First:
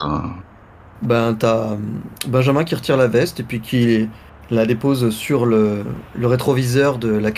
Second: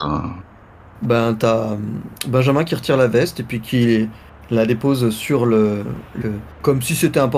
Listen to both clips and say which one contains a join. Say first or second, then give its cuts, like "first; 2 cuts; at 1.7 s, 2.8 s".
second; 1 cut; at 6.2 s